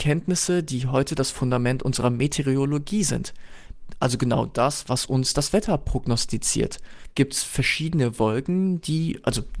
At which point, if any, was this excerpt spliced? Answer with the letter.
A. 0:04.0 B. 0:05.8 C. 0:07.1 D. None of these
D